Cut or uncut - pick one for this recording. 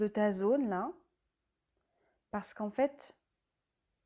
uncut